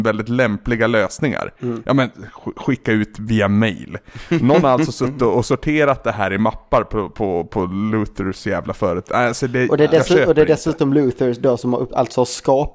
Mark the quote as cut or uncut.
uncut